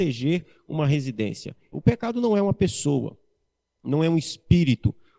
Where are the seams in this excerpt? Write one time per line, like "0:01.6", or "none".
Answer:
0:01.7